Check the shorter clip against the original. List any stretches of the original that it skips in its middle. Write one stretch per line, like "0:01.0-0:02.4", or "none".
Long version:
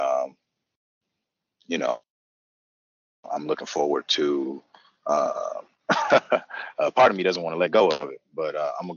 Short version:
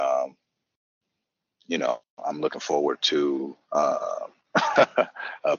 0:02.1-0:03.2
0:04.7-0:05.0